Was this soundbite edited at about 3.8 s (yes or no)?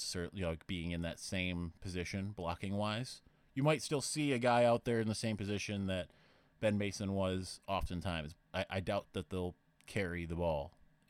no